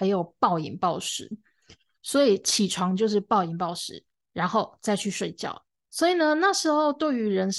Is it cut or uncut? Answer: cut